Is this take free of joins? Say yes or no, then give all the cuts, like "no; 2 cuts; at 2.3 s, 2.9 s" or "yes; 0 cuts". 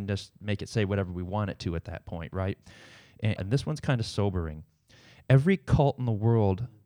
no; 1 cut; at 3.4 s